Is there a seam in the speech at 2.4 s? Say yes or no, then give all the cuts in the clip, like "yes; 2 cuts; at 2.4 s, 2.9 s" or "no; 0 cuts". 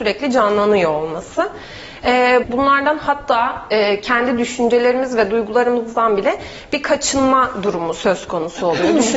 yes; 1 cut; at 2.4 s